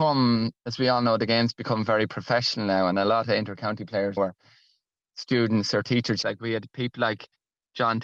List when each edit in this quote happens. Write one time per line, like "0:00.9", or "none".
0:04.2
0:06.2